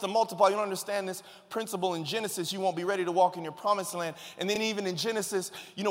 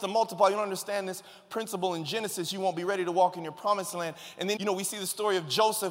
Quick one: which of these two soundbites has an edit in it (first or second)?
second